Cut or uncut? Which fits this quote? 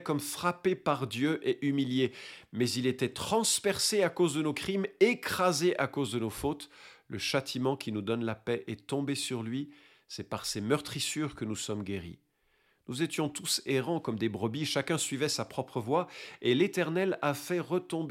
uncut